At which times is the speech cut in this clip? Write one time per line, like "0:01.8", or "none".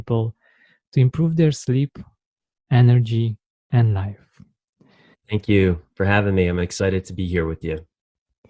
0:05.1